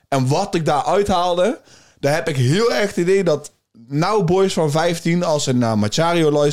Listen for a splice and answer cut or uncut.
uncut